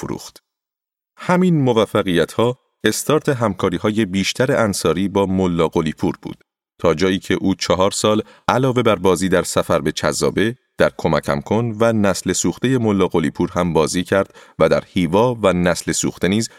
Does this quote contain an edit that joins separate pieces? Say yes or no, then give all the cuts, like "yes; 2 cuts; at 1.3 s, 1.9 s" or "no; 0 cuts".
no; 0 cuts